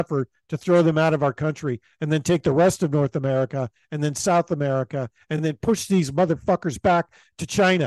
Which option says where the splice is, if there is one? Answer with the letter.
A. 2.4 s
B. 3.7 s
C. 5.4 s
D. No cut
D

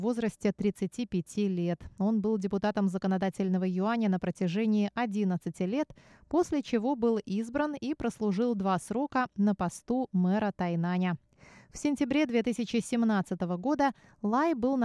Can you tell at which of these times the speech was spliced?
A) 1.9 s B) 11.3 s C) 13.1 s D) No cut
D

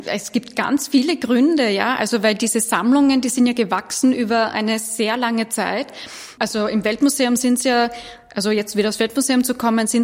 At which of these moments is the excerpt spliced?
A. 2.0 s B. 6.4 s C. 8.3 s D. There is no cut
B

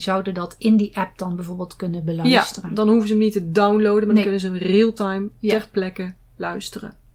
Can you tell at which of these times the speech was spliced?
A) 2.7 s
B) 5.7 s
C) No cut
C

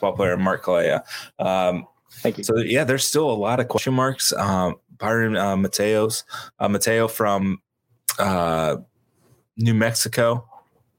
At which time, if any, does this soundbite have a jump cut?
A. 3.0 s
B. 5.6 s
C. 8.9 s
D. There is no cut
D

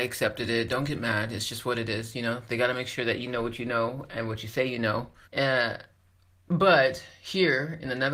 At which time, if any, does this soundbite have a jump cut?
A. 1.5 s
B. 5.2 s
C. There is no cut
B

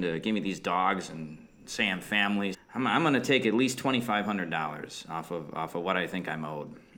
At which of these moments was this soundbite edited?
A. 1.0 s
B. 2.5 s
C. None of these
B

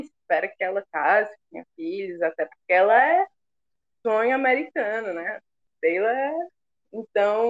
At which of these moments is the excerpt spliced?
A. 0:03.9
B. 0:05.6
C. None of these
A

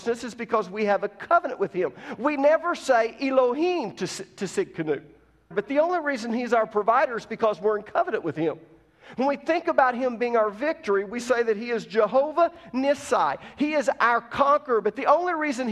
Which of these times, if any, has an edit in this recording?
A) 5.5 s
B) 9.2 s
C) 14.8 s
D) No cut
A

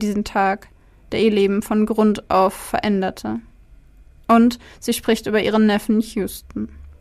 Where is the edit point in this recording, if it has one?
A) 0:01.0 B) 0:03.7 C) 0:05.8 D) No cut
D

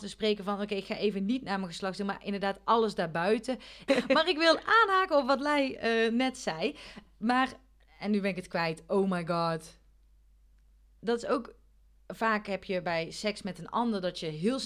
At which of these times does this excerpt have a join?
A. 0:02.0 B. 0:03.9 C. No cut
B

